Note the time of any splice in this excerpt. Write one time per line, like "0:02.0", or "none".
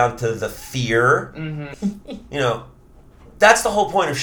0:01.7

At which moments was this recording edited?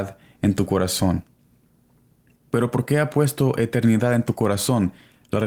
none

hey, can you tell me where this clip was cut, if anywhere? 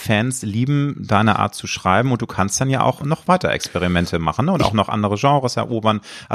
0:03.0

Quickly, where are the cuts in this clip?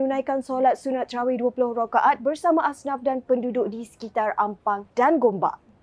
0:04.9

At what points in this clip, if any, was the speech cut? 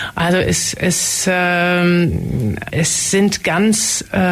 0:02.7

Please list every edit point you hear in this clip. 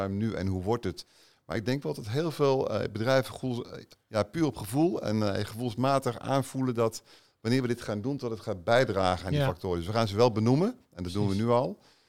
none

